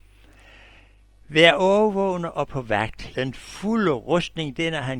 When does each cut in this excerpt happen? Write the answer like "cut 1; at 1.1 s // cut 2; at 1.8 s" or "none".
cut 1; at 3.1 s